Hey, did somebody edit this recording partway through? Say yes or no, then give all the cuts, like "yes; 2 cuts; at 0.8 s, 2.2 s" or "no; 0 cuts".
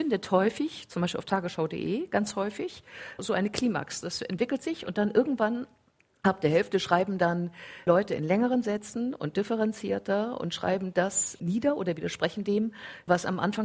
no; 0 cuts